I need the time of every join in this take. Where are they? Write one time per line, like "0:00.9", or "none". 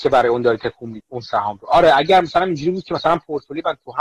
0:01.0